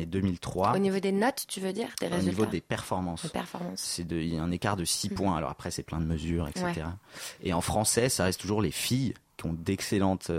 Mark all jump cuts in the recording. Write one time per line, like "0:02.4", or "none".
none